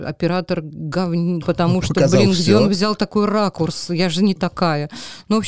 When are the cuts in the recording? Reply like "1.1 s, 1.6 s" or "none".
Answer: 1.4 s